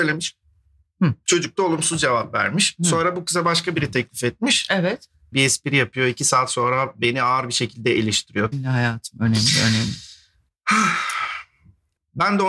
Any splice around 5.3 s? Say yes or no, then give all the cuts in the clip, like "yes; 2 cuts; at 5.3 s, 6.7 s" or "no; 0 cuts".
yes; 2 cuts; at 5.3 s, 8.5 s